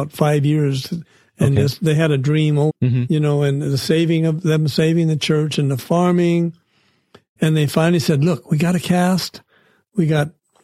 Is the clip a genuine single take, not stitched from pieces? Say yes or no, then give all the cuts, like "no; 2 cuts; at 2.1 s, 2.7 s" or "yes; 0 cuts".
no; 2 cuts; at 2.7 s, 7.4 s